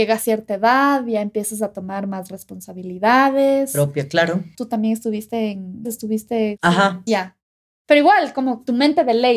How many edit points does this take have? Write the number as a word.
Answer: three